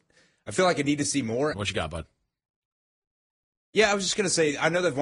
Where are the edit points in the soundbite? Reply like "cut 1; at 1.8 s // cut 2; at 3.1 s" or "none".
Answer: cut 1; at 1.5 s